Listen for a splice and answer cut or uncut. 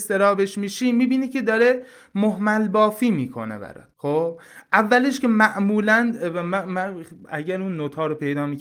cut